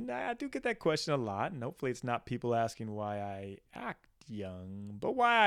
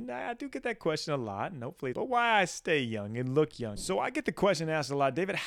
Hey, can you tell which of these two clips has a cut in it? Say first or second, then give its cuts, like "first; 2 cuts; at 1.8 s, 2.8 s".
second; 2 cuts; at 1.9 s, 3.8 s